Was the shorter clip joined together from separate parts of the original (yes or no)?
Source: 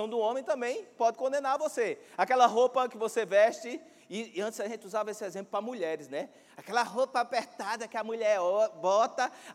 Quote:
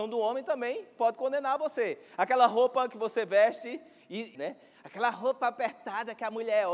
yes